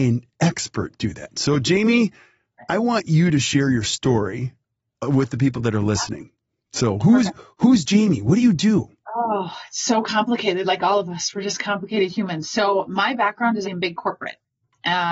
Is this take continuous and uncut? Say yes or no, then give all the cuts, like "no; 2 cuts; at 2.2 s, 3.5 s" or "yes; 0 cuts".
no; 1 cut; at 13.6 s